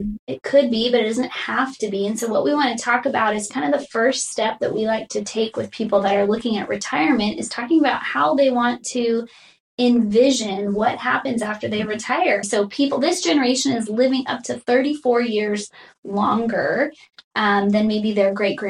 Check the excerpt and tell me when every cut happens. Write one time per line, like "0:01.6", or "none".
0:12.4

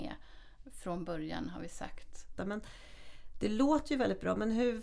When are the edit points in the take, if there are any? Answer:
0:02.4

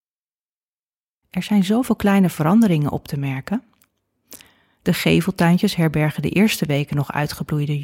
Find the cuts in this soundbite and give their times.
0:01.2

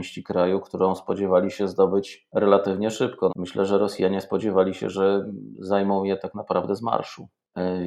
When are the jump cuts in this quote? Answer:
0:03.3

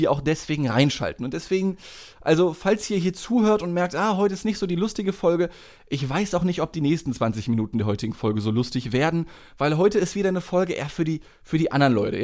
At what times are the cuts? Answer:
none

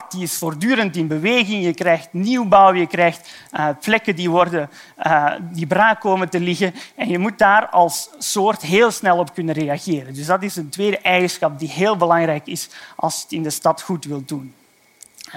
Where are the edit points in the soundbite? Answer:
none

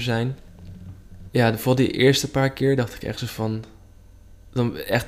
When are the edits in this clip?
0:01.3

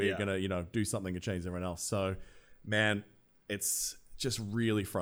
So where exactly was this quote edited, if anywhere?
none

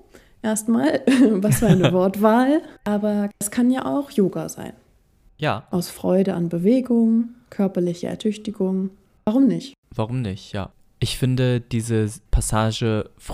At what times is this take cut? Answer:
none

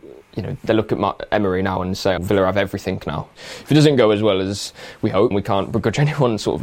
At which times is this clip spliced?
0:02.2
0:03.4
0:05.3

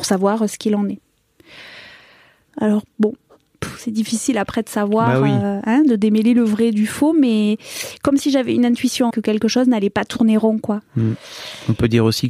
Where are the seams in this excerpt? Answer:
0:02.5
0:09.1

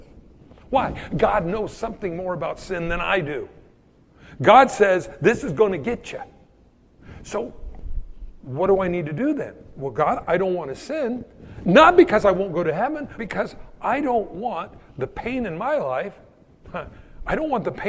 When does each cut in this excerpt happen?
0:10.2
0:13.2

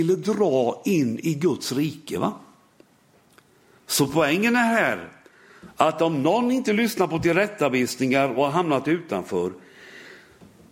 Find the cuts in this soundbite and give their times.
none

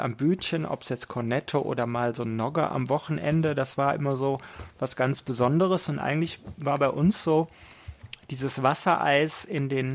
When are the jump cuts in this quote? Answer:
none

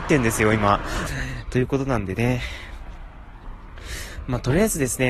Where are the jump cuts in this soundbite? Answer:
0:01.1

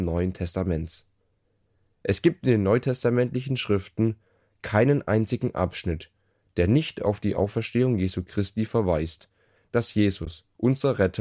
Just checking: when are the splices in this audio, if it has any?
0:09.6

